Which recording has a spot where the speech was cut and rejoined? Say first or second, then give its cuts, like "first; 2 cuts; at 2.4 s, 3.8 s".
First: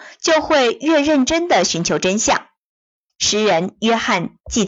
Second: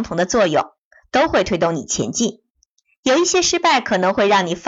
first; 1 cut; at 3.1 s